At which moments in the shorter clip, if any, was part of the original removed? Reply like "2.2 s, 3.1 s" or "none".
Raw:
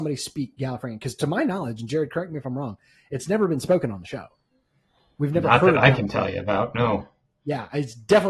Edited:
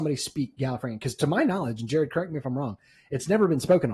none